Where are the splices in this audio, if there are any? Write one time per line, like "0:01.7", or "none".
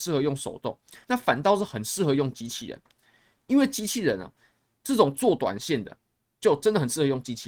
none